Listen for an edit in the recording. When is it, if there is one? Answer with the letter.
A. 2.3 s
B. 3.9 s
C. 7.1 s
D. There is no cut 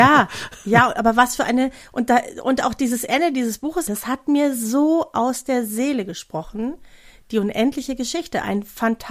B